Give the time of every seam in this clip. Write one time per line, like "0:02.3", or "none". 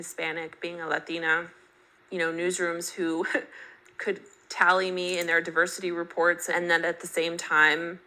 0:02.0